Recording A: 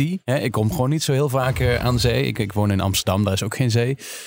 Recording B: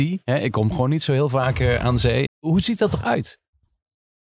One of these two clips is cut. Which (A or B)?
B